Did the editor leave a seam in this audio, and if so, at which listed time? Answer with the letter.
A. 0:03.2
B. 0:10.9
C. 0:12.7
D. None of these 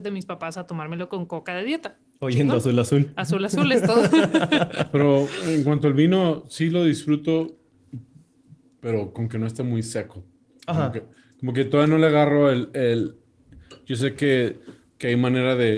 D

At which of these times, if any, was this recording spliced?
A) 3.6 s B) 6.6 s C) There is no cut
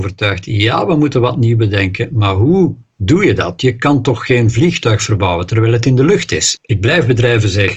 B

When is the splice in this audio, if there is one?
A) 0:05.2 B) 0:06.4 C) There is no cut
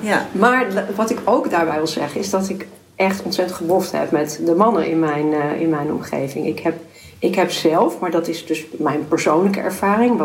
C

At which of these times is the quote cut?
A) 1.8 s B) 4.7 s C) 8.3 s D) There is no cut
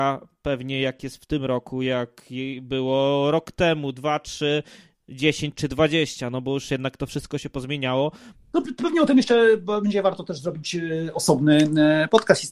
C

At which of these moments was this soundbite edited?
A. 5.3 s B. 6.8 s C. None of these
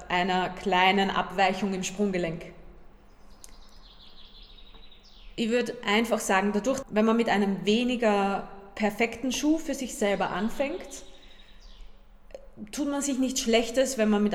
B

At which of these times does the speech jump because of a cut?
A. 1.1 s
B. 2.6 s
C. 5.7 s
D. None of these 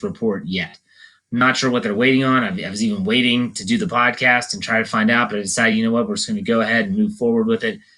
D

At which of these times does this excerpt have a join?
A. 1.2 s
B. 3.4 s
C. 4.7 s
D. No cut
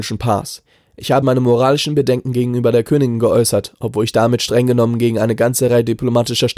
A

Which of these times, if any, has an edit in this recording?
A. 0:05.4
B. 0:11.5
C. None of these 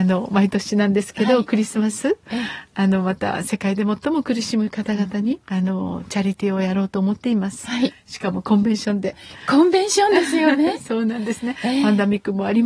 A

